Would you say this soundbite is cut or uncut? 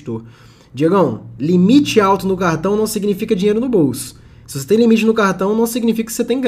uncut